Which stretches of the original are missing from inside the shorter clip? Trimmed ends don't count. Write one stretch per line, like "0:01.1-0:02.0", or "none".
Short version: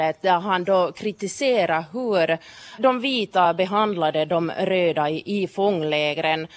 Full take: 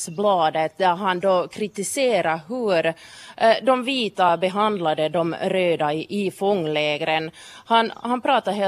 0:03.3-0:03.6